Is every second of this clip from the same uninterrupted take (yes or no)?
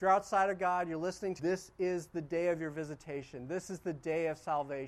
no